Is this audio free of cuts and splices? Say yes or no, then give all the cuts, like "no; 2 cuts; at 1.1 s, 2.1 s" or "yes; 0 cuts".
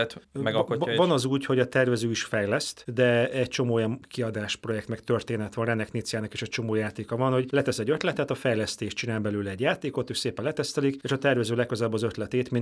yes; 0 cuts